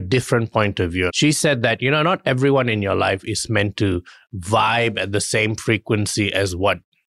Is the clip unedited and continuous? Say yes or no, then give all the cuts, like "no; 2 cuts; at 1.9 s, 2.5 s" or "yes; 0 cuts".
no; 1 cut; at 1.1 s